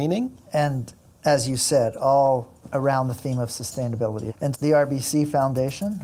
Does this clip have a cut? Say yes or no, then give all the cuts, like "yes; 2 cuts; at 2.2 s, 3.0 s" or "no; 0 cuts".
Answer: yes; 1 cut; at 4.5 s